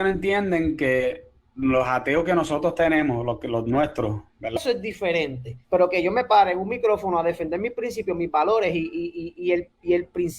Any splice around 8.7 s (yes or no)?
no